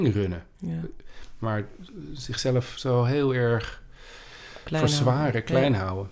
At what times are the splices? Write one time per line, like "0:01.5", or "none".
none